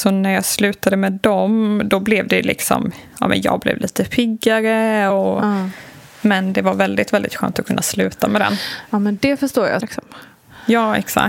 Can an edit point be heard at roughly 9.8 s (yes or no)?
yes